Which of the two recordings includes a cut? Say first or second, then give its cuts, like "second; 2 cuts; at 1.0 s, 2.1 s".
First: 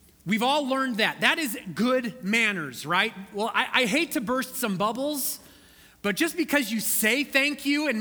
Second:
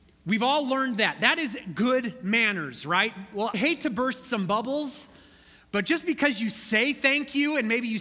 second; 1 cut; at 3.5 s